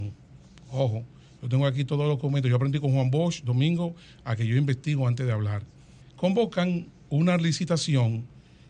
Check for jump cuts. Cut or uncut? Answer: cut